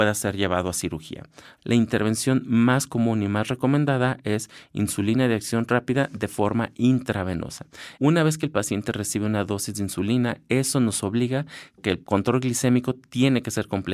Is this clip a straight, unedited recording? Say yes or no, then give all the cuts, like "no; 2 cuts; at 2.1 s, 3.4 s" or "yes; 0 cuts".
no; 2 cuts; at 1.6 s, 7.9 s